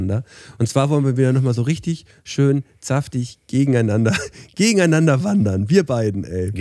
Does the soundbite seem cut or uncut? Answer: uncut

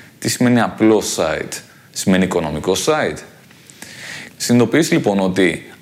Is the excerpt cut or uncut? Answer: cut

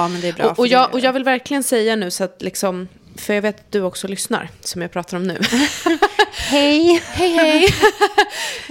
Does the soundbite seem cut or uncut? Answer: uncut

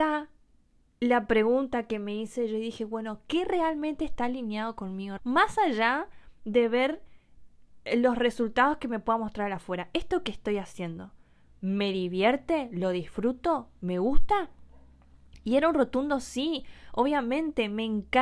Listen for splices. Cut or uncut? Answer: cut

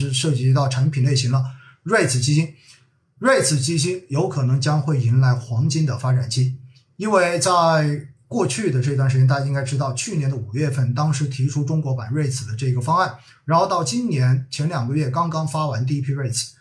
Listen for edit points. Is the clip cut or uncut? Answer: uncut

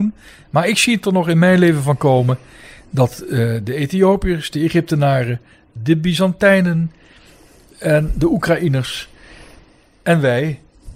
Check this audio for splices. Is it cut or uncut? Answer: uncut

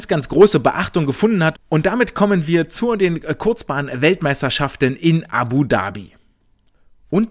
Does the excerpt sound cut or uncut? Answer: cut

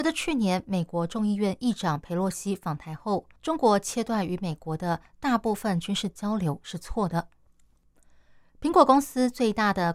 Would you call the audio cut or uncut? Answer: cut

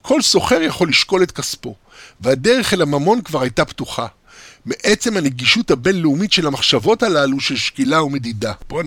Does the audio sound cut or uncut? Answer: uncut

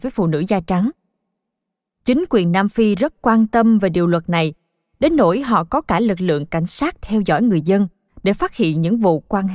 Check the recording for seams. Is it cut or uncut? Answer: uncut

